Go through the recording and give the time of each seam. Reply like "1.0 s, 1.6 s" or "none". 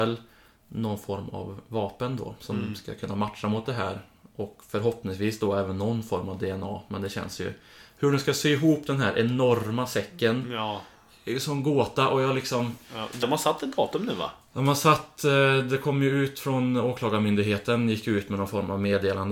13.2 s